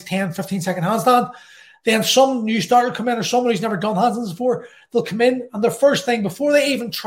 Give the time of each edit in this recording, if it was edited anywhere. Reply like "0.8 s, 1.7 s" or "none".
none